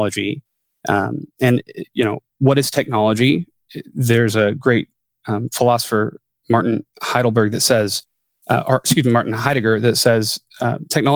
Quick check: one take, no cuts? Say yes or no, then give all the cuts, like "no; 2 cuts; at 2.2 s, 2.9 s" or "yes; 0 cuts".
yes; 0 cuts